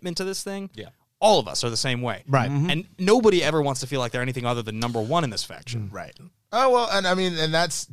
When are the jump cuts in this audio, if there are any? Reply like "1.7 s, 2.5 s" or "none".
none